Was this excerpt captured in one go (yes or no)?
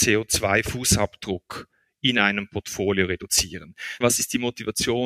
no